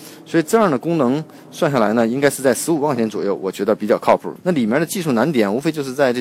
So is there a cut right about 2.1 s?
no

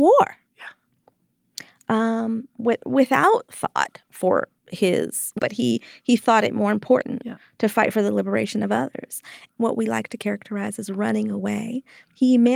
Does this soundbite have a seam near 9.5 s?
yes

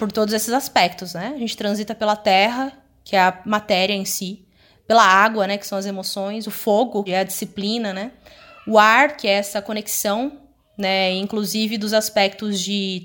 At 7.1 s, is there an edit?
yes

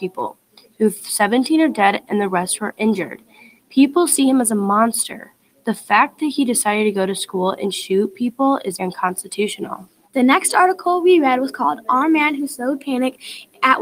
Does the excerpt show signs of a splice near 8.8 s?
yes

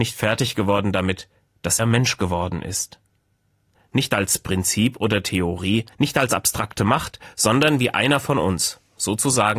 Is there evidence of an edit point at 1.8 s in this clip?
yes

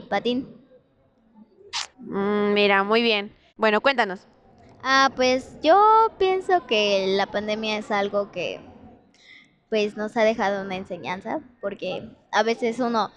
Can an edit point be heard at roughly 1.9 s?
yes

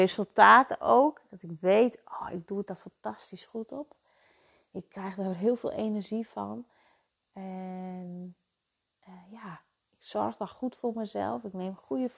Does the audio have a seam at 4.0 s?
no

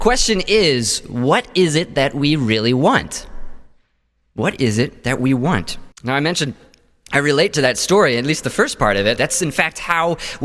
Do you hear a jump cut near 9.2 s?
yes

